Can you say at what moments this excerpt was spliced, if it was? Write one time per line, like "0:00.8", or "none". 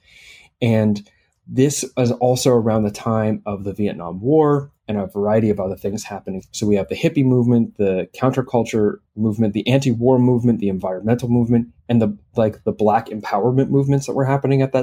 0:06.4